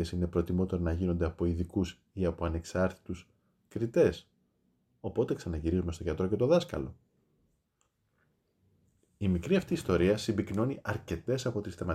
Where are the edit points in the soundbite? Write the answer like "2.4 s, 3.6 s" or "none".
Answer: none